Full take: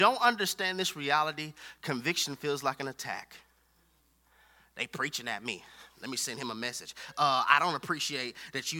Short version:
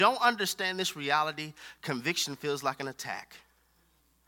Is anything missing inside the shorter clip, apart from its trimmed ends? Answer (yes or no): no